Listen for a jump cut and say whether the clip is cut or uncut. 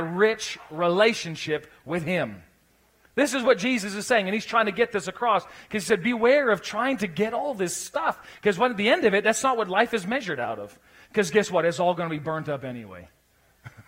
uncut